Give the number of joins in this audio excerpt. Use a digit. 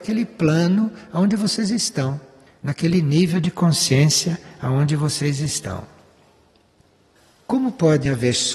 0